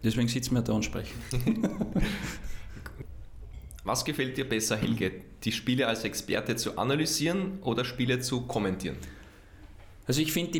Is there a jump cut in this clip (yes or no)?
no